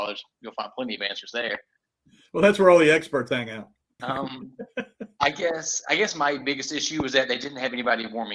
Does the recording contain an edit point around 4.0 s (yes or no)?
yes